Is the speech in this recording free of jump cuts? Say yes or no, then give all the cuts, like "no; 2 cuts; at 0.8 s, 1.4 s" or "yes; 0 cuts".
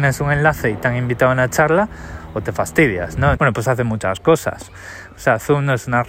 no; 2 cuts; at 3.3 s, 5.1 s